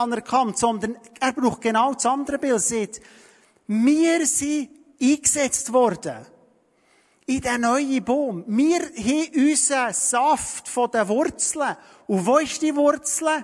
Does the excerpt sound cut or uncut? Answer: uncut